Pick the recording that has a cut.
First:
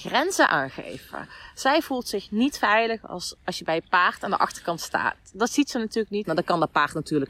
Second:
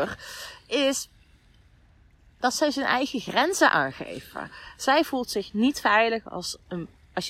first; 2 cuts; at 3.4 s, 6.2 s

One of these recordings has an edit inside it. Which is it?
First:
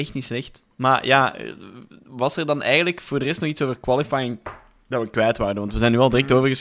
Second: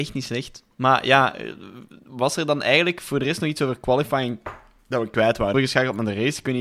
second; 1 cut; at 5.5 s

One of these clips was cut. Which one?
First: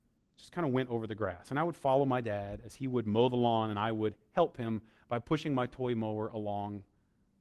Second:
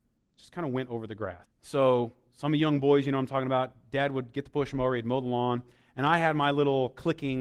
second; 1 cut; at 1.4 s

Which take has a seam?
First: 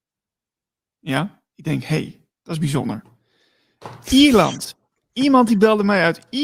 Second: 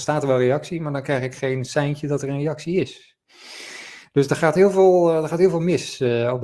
first; 1 cut; at 1.5 s

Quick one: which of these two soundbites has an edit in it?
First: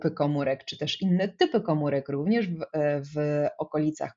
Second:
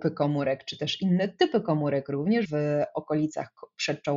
second; 1 cut; at 2.5 s

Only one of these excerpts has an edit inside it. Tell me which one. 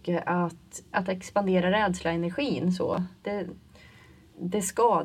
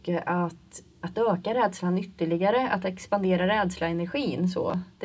first; 1 cut; at 0.9 s

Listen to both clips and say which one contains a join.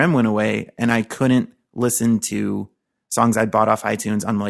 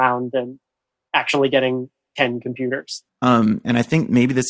second; 1 cut; at 3.1 s

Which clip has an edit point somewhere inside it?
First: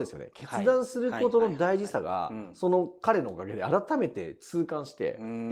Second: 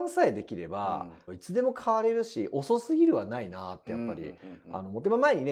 second; 1 cut; at 1.3 s

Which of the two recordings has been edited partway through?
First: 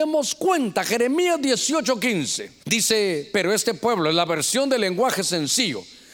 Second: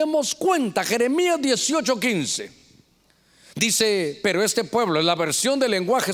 first; 1 cut; at 2.6 s

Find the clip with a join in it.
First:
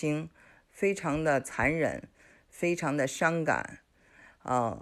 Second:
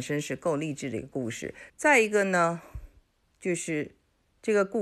second; 1 cut; at 1.7 s

